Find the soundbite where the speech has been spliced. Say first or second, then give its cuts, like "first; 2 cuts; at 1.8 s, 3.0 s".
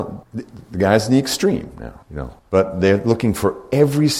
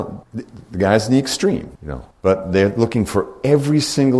second; 1 cut; at 1.8 s